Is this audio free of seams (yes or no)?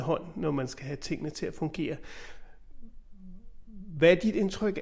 yes